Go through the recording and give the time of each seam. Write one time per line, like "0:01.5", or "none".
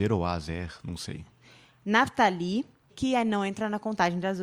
0:02.9